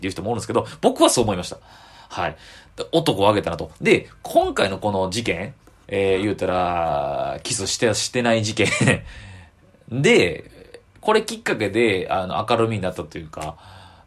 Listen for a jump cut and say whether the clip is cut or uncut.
uncut